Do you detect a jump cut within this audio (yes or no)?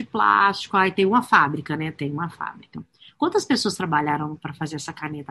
no